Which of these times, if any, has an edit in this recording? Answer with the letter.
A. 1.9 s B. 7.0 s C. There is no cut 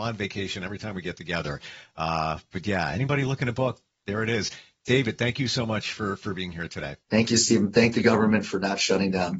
B